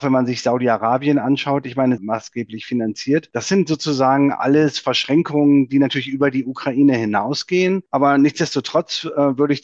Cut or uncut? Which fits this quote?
cut